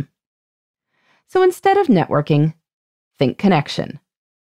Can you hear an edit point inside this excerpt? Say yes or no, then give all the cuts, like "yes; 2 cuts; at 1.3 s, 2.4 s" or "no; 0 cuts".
no; 0 cuts